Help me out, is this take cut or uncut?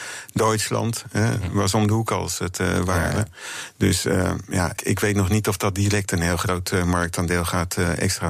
cut